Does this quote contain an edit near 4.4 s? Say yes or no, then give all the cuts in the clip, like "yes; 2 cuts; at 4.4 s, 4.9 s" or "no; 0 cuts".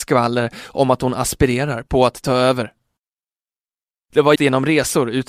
yes; 1 cut; at 4.4 s